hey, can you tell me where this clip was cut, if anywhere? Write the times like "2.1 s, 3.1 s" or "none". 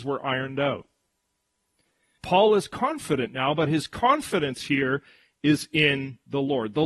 2.2 s